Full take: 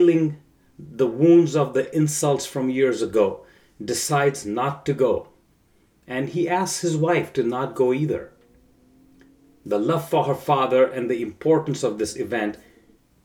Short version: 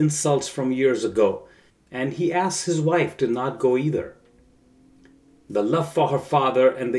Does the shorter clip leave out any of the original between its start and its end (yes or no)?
yes